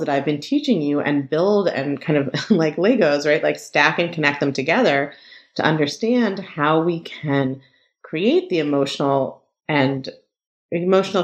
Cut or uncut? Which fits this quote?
uncut